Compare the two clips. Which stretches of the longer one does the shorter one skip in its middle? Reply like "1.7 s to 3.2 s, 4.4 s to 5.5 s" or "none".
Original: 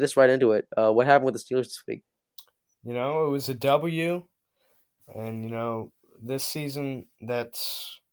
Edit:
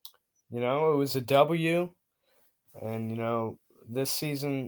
none